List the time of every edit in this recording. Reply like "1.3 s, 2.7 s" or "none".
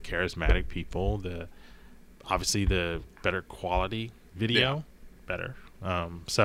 5.2 s